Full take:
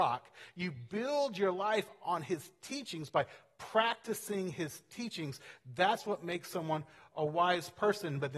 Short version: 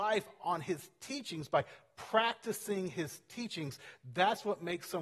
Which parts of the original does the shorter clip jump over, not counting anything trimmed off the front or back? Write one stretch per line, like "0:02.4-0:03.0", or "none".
none

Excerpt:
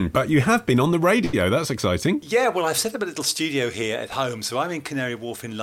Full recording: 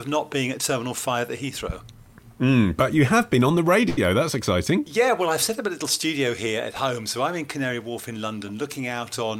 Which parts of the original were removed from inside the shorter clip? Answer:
none

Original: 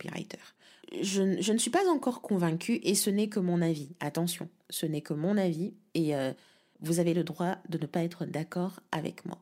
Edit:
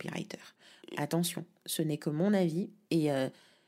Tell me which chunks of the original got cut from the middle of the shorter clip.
0:00.9-0:04.0

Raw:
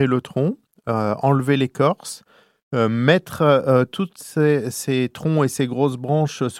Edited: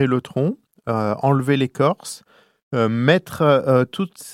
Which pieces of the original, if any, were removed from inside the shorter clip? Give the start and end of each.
none

